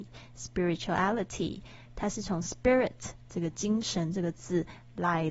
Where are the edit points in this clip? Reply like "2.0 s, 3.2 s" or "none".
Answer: none